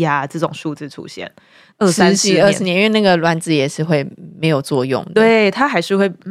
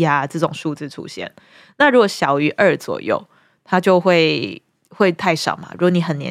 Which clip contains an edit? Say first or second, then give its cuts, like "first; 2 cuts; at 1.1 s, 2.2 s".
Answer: first; 1 cut; at 1.7 s